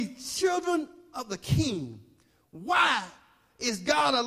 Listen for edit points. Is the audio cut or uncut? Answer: uncut